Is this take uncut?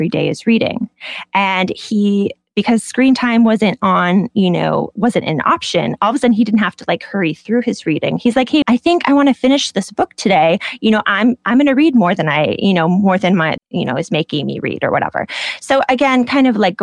no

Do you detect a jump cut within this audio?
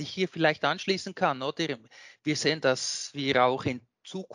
no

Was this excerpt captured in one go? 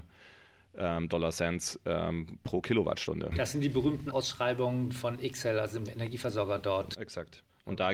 yes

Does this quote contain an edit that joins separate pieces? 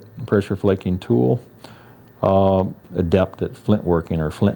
yes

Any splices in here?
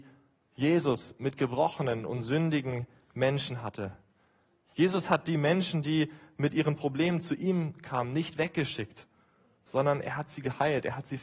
no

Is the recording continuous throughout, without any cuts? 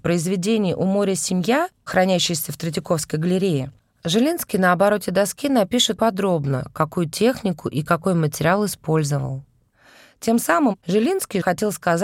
no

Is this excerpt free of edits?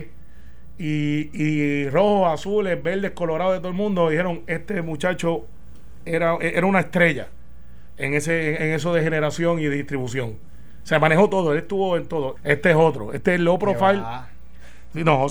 no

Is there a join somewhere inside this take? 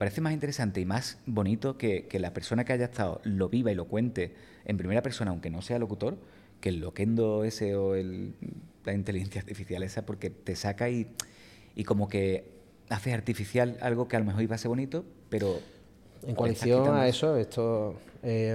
no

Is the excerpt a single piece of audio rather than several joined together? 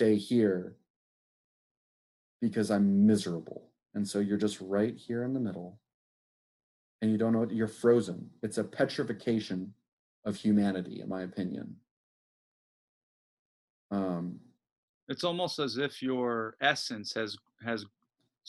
yes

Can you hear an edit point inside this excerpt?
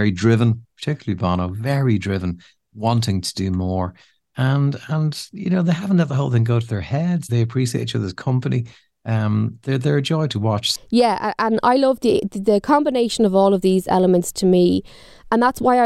yes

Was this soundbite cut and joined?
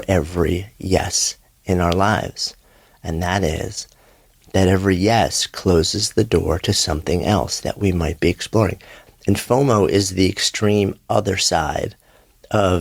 yes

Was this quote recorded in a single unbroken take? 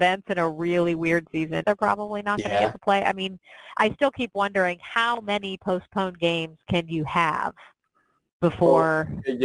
no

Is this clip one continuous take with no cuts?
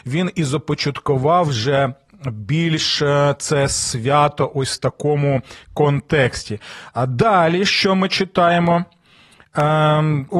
yes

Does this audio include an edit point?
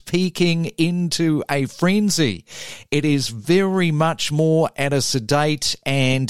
no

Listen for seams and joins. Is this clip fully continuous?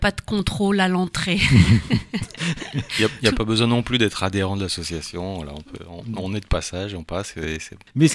yes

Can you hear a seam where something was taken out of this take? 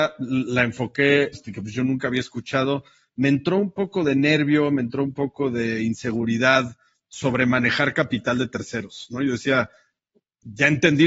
yes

